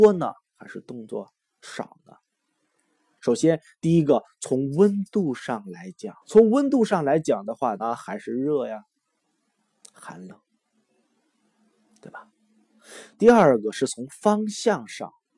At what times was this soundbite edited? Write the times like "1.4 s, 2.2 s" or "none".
3.2 s, 6.2 s, 7.8 s